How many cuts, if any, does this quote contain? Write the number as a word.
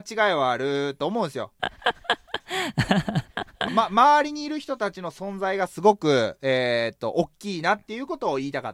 two